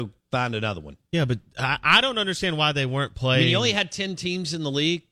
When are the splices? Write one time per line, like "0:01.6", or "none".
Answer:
none